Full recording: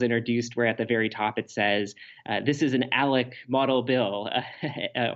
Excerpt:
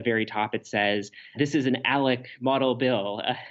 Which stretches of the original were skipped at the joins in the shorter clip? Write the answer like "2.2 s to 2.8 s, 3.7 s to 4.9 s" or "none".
2.2 s to 2.4 s